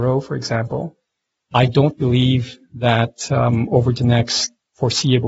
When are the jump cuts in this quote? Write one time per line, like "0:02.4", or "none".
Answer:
none